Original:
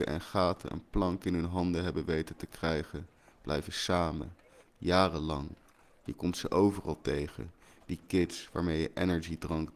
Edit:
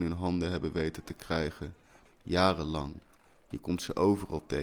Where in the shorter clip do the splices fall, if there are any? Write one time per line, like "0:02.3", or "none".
0:02.0